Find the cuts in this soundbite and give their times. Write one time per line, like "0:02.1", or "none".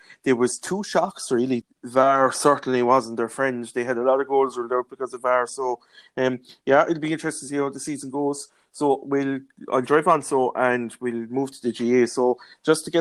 0:01.6